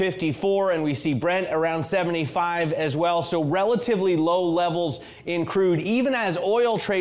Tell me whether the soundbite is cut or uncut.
uncut